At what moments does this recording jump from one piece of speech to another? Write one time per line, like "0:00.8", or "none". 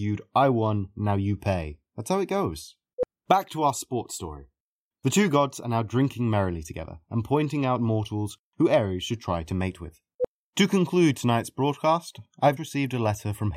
0:04.9
0:12.6